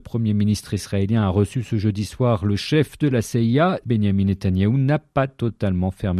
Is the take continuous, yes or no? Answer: no